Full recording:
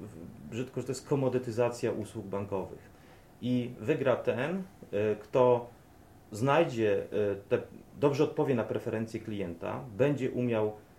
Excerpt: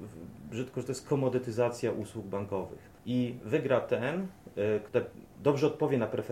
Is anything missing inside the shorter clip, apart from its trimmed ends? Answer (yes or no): yes